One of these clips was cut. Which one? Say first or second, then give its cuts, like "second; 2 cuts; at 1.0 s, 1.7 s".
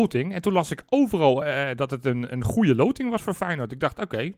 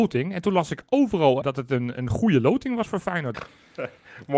second; 2 cuts; at 1.4 s, 3.3 s